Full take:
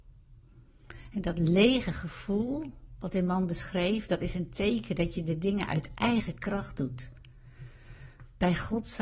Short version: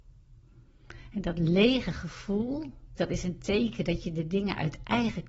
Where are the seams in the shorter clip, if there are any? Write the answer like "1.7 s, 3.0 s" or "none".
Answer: 3.0 s

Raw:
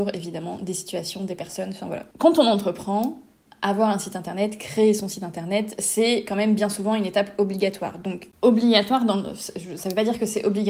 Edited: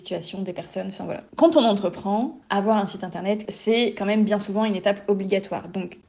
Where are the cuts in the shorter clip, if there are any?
2.4 s, 3.5 s

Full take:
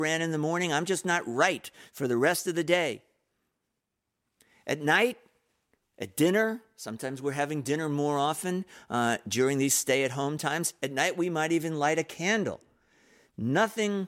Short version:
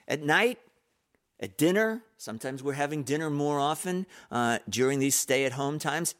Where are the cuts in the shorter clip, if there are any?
none

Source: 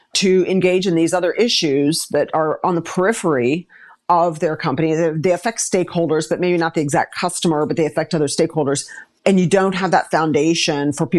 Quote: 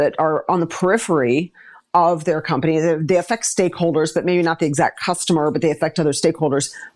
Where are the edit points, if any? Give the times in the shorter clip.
none

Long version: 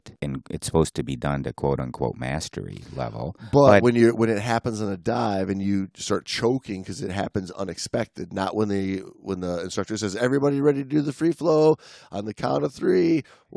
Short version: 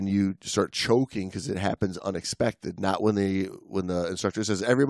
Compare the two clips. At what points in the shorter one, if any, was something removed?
none

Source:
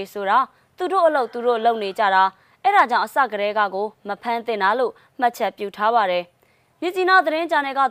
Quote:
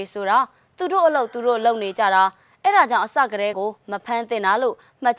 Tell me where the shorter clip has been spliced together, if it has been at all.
3.5 s

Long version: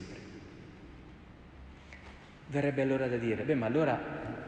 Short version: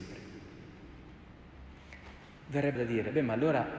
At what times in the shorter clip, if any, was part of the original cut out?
2.8 s

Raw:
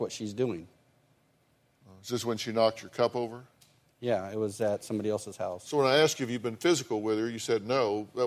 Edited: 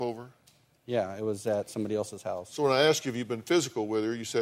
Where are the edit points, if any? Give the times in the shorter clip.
none

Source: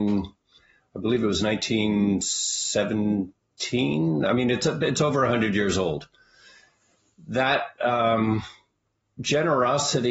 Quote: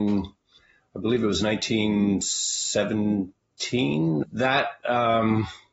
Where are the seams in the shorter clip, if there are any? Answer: 4.2 s

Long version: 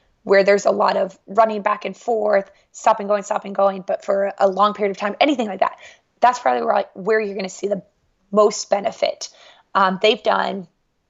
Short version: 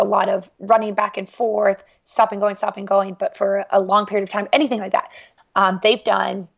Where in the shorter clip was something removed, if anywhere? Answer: 5.4 s

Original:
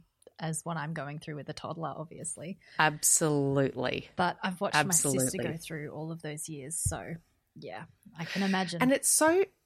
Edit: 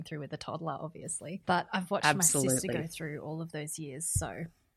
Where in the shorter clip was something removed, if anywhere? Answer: 1.4 s

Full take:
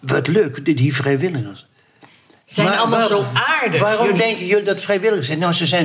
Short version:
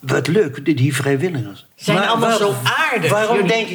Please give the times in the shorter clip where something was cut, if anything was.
1.7 s

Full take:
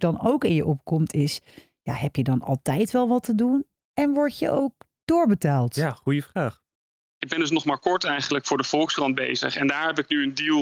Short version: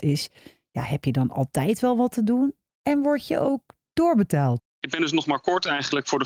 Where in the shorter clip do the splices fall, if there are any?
4.6 s

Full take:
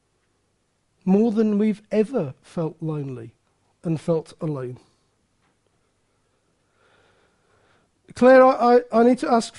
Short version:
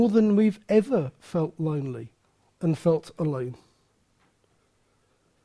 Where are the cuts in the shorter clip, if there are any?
none

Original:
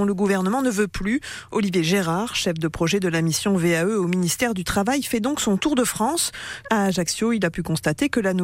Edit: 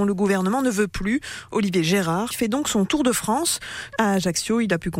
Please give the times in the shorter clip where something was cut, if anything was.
2.3 s

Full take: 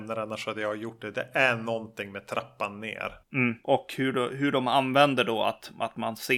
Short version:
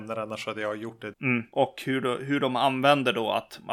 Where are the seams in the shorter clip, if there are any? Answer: 1.1 s

